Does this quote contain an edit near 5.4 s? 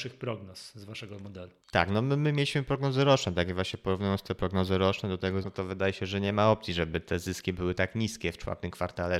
yes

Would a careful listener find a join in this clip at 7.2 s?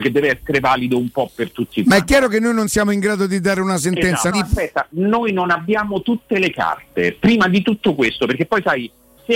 no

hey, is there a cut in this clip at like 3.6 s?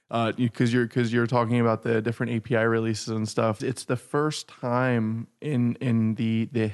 yes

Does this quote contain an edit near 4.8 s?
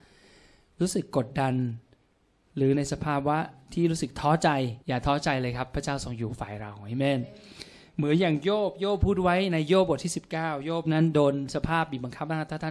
yes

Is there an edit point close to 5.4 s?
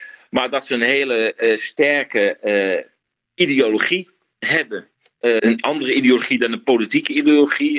yes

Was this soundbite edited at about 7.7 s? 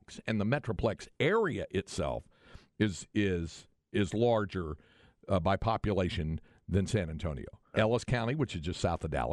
yes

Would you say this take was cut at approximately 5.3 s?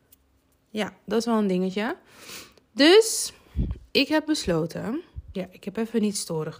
yes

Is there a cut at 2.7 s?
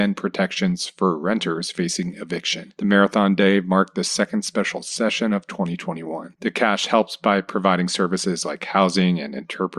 no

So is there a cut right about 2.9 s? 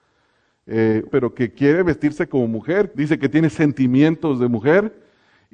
yes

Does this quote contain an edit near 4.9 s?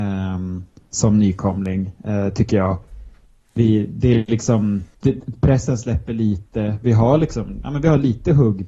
yes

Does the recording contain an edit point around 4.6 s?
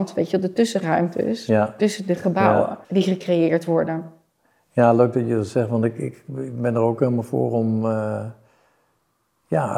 no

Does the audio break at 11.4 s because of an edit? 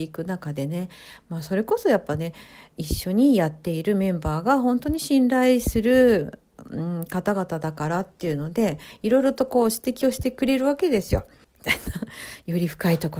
yes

